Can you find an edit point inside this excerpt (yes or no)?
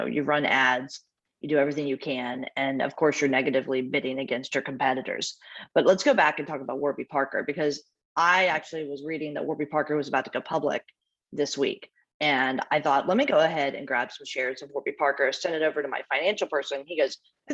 no